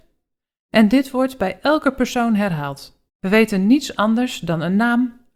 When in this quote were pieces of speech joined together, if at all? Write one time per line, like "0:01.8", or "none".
0:03.1